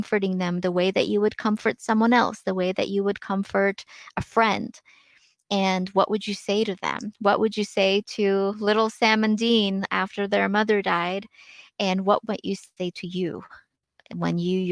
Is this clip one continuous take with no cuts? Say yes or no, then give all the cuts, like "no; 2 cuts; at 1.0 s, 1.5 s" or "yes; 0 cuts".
yes; 0 cuts